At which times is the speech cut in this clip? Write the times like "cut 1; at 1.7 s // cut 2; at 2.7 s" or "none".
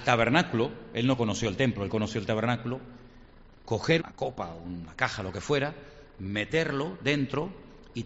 cut 1; at 4.0 s